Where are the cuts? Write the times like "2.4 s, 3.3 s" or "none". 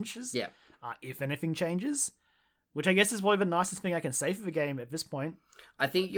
none